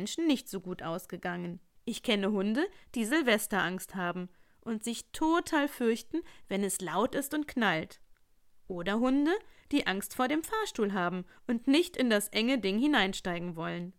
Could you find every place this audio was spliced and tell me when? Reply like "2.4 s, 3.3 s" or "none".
1.8 s